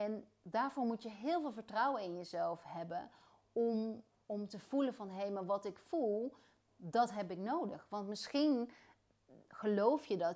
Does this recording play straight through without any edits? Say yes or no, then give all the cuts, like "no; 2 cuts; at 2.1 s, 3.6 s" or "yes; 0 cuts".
yes; 0 cuts